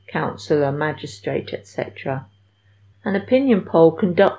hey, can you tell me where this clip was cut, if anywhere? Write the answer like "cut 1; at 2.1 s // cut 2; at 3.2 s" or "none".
cut 1; at 2.9 s

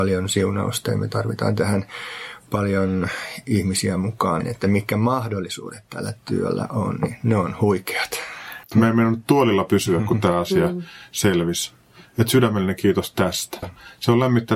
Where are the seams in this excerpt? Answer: cut 1; at 4.4 s // cut 2; at 8.7 s // cut 3; at 13.6 s

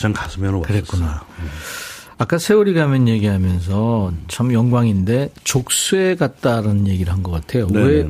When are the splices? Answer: none

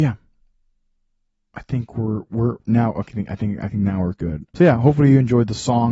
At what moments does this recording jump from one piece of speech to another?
cut 1; at 4.5 s

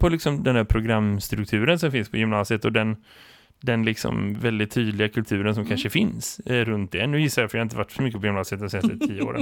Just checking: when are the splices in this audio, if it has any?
none

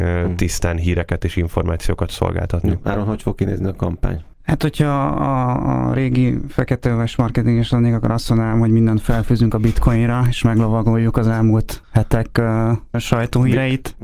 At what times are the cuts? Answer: none

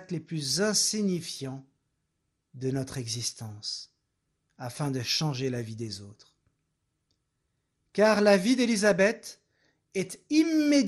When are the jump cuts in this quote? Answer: none

